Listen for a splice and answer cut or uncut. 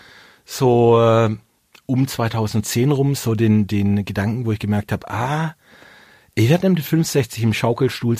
uncut